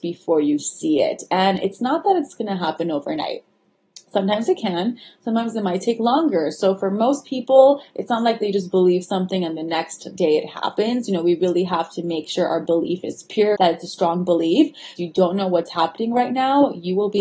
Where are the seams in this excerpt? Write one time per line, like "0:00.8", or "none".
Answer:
0:13.6
0:15.0